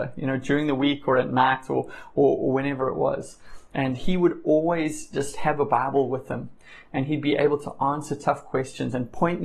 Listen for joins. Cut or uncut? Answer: uncut